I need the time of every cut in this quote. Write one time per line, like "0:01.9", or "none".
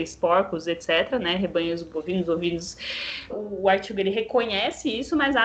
0:03.3